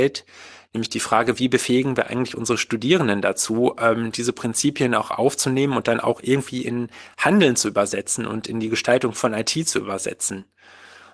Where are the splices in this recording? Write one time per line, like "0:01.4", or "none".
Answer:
none